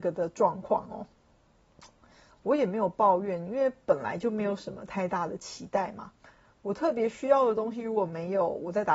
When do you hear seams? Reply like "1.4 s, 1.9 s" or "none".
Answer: 2.3 s